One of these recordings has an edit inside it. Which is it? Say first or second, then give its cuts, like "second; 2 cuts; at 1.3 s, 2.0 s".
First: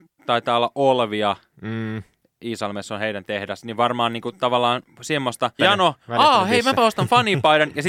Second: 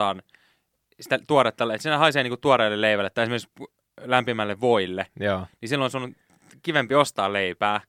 first; 1 cut; at 5.6 s